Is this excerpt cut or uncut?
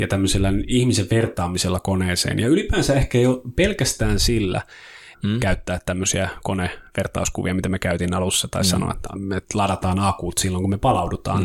cut